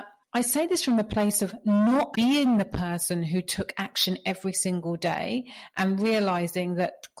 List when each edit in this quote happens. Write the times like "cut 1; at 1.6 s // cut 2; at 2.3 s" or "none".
cut 1; at 2.1 s

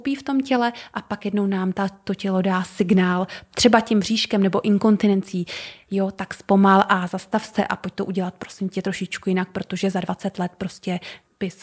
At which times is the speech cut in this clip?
none

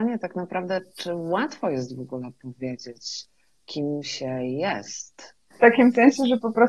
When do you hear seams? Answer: cut 1; at 5.5 s

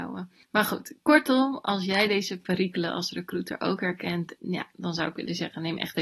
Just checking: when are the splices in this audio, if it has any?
cut 1; at 4.4 s

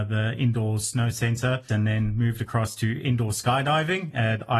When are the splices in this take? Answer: cut 1; at 1.7 s

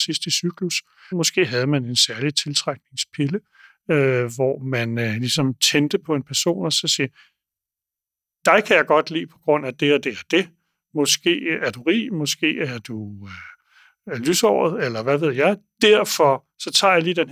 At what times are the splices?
cut 1; at 1.1 s

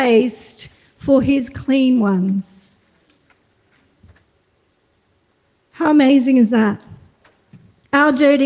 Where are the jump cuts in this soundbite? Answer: none

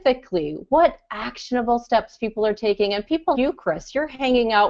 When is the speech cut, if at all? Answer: cut 1; at 3.3 s

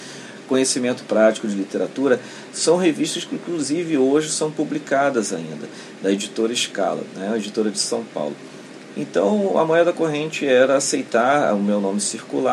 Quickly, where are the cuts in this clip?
none

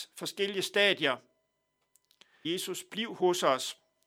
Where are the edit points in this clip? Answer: cut 1; at 2.4 s

